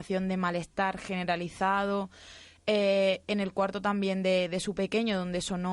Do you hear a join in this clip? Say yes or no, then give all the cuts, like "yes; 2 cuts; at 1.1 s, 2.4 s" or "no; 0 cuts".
no; 0 cuts